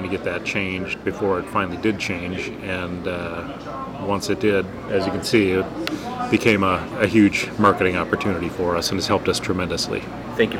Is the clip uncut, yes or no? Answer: no